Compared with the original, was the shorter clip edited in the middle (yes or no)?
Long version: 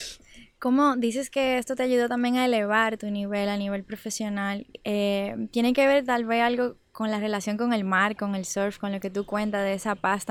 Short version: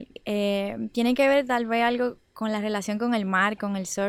no